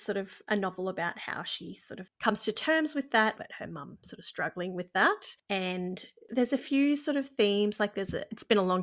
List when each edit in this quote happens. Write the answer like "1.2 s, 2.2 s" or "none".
3.3 s